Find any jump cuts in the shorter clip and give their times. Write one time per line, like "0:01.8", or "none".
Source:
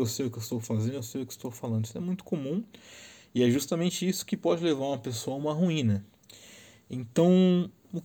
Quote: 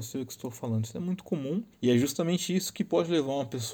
0:01.7